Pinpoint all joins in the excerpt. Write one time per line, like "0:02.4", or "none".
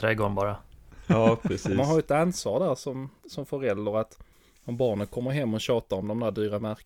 none